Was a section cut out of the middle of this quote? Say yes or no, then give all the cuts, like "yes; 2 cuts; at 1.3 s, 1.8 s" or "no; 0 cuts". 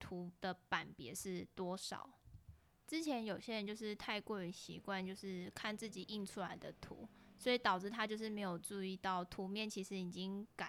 no; 0 cuts